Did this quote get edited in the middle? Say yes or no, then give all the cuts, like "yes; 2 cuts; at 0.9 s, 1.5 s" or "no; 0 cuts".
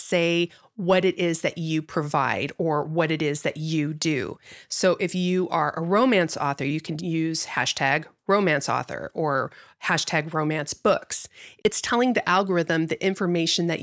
no; 0 cuts